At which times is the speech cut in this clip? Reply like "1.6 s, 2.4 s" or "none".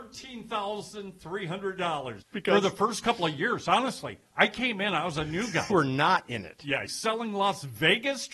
2.2 s, 5.7 s, 6.9 s